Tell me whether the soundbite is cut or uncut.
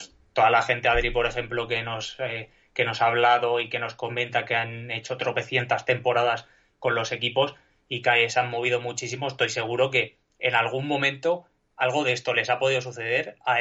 uncut